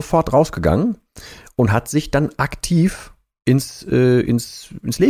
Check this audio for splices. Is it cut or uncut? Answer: uncut